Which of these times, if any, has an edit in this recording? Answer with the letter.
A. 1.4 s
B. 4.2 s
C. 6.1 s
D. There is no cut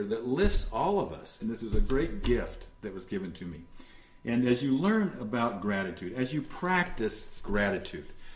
A